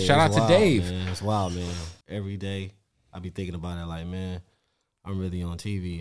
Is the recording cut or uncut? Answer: cut